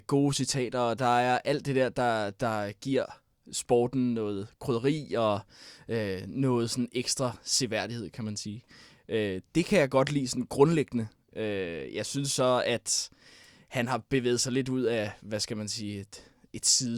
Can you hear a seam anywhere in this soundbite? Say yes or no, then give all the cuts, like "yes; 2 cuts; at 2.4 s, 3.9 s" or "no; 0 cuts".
no; 0 cuts